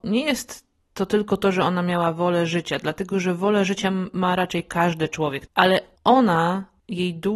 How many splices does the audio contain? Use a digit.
1